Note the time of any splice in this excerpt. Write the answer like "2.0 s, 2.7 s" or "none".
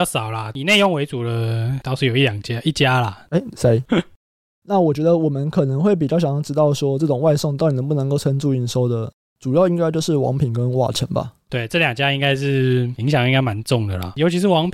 3.8 s